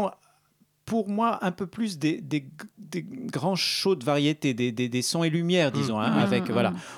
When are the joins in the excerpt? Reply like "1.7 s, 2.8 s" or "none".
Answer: none